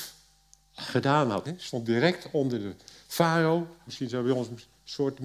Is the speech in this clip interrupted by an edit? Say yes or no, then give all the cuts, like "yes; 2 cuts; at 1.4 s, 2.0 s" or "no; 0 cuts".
yes; 2 cuts; at 1.4 s, 3.9 s